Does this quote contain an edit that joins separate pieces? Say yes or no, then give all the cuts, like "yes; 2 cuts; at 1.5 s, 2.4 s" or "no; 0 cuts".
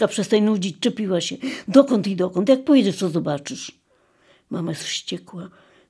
no; 0 cuts